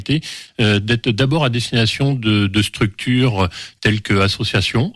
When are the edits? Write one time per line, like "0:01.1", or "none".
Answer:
none